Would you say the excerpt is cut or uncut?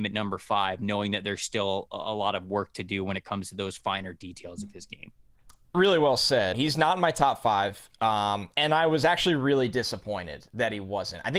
cut